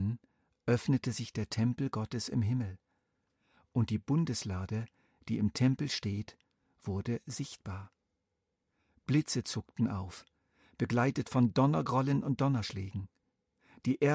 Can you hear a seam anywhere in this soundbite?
no; 0 cuts

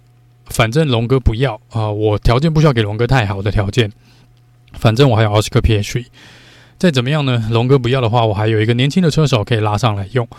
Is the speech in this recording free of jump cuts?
yes; 0 cuts

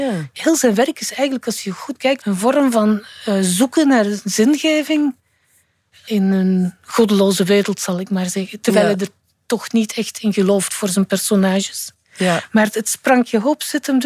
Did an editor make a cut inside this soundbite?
no; 0 cuts

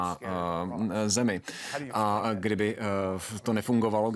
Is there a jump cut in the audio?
no; 0 cuts

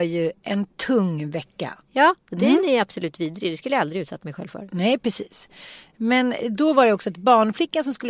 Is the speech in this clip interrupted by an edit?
no; 0 cuts

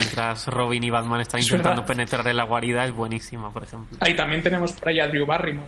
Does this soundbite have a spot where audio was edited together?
no; 0 cuts

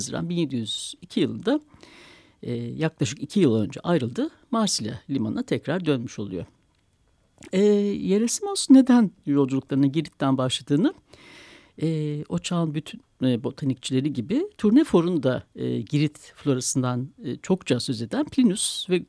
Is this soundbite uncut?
yes; 0 cuts

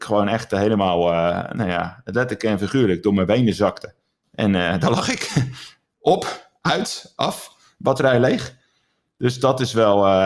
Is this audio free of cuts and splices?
yes; 0 cuts

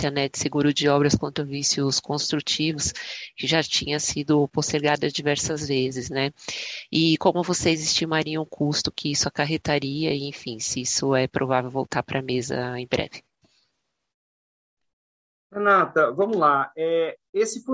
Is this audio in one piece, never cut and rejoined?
yes; 0 cuts

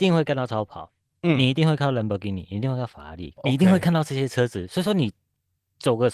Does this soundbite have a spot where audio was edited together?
yes; 1 cut; at 3.4 s

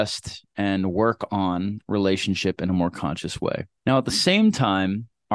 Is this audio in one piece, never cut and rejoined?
yes; 0 cuts

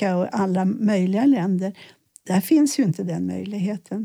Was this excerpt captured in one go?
yes; 0 cuts

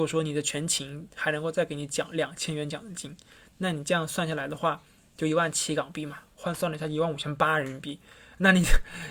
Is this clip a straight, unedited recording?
yes; 0 cuts

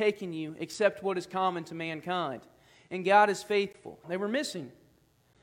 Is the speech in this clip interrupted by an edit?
yes; 1 cut; at 4.0 s

